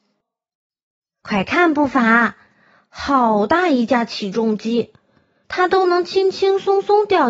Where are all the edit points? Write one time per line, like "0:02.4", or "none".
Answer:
0:05.4